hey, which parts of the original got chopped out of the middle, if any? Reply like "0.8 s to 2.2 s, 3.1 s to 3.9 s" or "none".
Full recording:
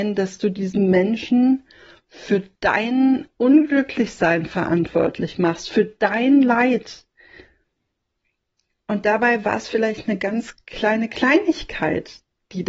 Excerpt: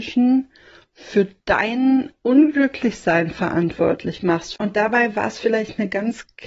5.7 s to 8.8 s